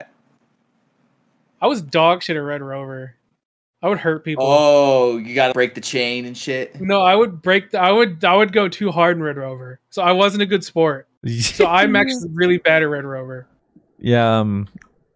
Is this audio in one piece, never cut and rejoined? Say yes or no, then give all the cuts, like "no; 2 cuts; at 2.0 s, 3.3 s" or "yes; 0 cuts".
no; 1 cut; at 5.5 s